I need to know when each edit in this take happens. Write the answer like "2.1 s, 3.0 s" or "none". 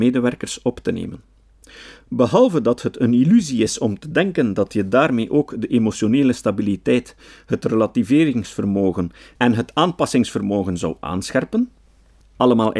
none